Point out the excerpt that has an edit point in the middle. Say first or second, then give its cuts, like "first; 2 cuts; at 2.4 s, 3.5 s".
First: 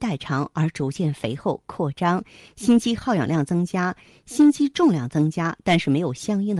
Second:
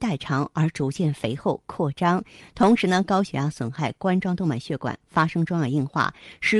second; 1 cut; at 2.4 s